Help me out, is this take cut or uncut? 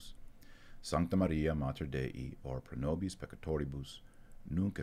uncut